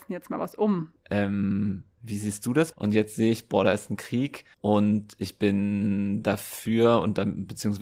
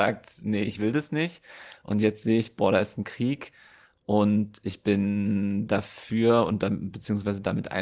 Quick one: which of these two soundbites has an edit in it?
first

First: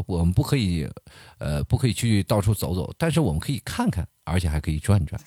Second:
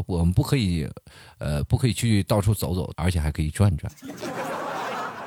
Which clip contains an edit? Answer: second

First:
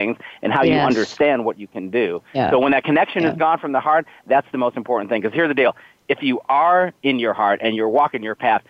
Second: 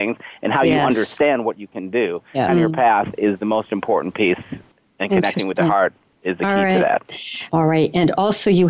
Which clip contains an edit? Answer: second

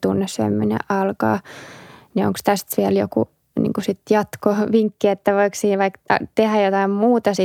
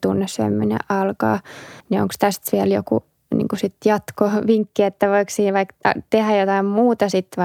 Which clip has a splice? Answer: second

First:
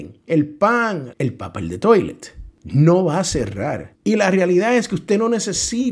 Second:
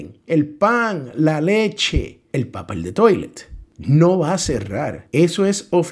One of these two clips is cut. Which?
first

